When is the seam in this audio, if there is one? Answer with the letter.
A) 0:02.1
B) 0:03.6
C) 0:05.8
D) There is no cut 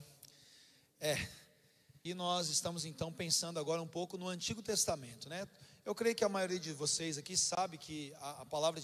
A